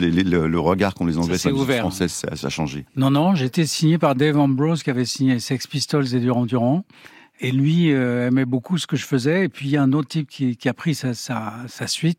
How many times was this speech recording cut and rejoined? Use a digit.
1